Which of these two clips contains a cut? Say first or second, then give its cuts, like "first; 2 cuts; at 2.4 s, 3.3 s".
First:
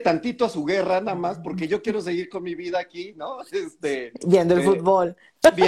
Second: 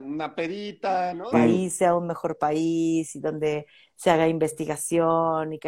second; 1 cut; at 1.3 s